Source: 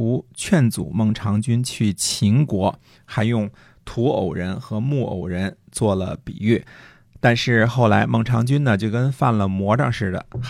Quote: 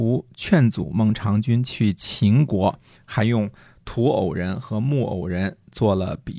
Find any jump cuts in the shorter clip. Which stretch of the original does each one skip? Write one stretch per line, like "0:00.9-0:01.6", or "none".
none